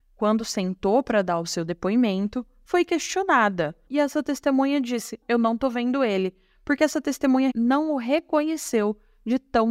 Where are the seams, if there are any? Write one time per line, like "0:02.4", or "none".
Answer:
0:03.9
0:05.2
0:07.5